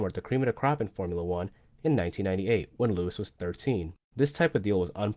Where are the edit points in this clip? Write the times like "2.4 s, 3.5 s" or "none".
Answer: 4.0 s